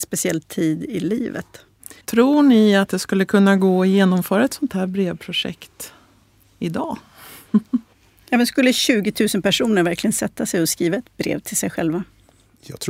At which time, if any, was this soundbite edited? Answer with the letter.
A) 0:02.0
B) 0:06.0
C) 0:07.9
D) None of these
A